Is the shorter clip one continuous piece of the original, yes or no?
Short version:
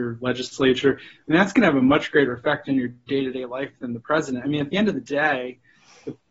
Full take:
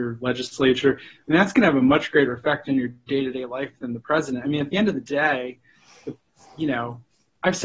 yes